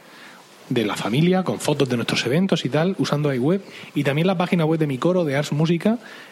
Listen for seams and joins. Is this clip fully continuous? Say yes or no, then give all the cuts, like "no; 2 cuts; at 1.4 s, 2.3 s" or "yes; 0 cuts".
yes; 0 cuts